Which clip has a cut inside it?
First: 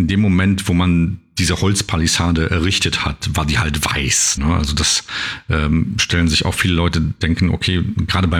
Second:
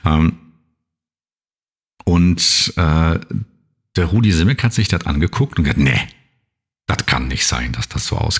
first; 1 cut; at 4.4 s

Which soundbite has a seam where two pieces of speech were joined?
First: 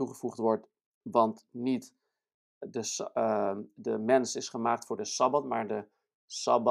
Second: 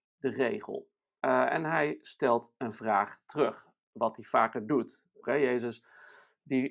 second; 2 cuts; at 1.2 s, 5.2 s

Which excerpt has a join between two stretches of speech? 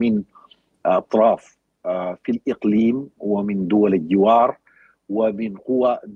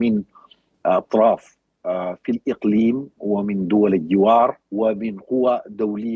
second; 1 cut; at 4.6 s

